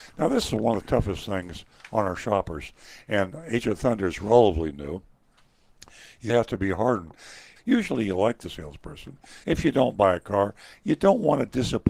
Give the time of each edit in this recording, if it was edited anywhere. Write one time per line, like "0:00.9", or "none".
0:06.3
0:07.6
0:09.4